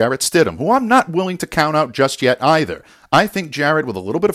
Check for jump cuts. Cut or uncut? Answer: uncut